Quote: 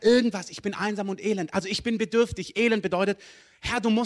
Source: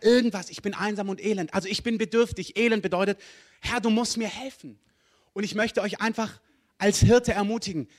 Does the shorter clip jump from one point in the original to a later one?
no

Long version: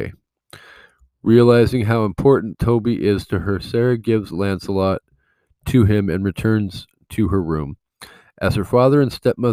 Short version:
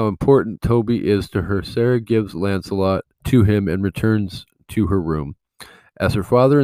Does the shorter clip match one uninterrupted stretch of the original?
no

